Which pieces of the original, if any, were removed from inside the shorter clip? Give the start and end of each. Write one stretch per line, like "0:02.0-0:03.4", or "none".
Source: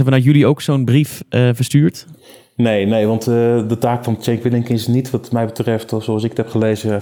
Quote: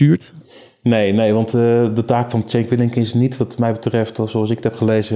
none